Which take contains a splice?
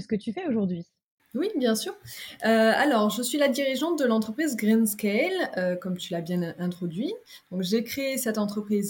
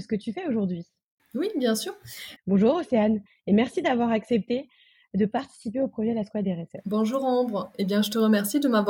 second; 1 cut; at 2.4 s

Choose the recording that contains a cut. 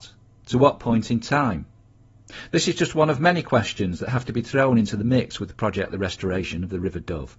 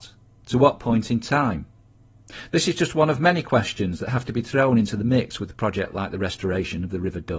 first; 1 cut; at 5.9 s

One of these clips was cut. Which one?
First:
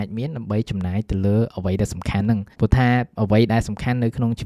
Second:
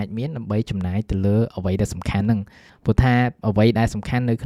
first; 1 cut; at 2.5 s

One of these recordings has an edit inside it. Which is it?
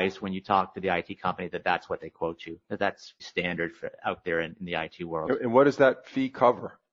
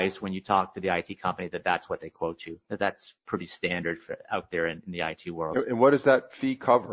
first; 1 cut; at 3.2 s

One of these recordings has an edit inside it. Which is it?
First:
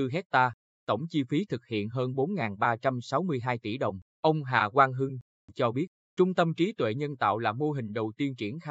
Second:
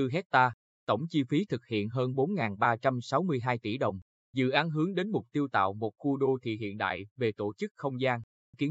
first; 2 cuts; at 4.1 s, 5.4 s

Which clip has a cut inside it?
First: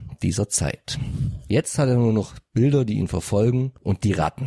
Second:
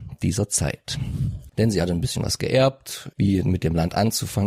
second; 2 cuts; at 1.5 s, 3.1 s

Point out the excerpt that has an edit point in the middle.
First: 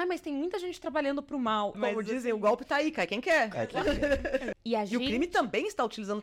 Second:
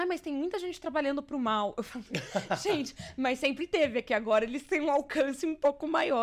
first; 2 cuts; at 1.7 s, 4.5 s

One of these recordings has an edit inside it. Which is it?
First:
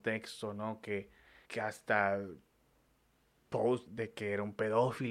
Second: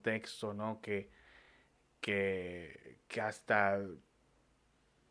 first; 2 cuts; at 1.4 s, 3.9 s

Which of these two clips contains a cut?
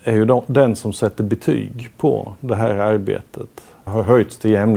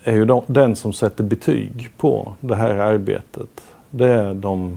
first; 1 cut; at 3.9 s

